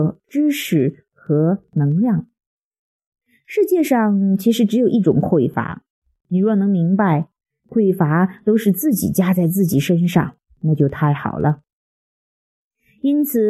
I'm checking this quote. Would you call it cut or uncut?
uncut